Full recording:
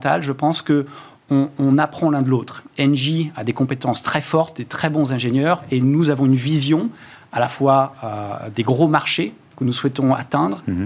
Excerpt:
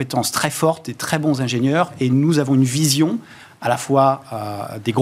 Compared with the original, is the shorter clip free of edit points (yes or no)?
yes